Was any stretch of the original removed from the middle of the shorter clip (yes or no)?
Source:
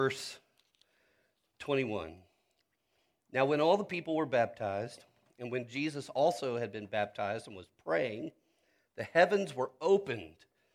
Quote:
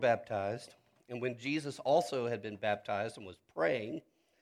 no